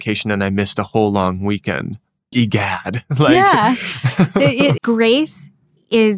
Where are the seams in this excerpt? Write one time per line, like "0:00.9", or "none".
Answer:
0:02.3
0:04.8